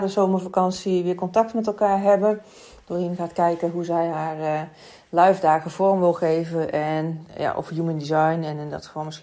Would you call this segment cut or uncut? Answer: uncut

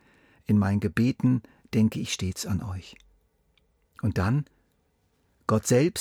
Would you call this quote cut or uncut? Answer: cut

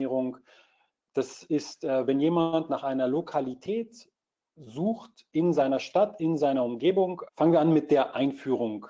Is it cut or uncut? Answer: cut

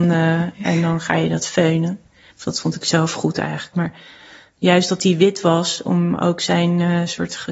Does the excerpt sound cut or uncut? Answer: cut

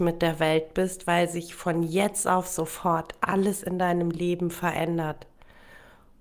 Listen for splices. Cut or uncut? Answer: uncut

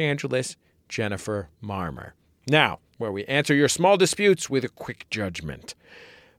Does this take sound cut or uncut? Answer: cut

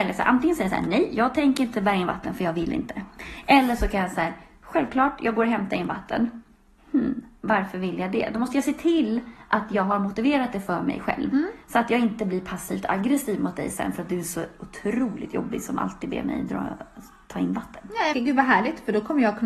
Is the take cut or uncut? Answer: cut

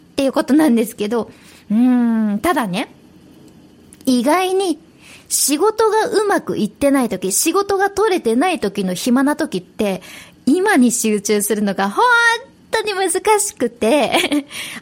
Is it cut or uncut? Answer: uncut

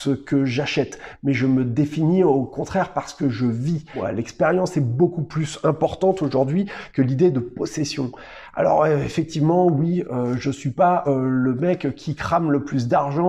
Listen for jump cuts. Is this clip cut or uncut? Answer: uncut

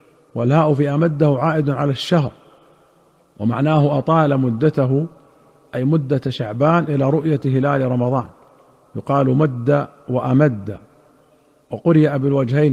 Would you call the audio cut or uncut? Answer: uncut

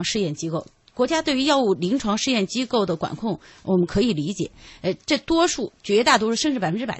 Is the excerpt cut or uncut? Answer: uncut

